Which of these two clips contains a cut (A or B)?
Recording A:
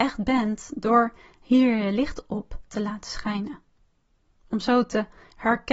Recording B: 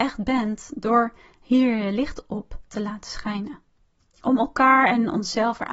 B